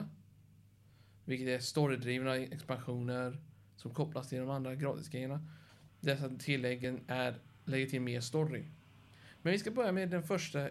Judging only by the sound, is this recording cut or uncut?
cut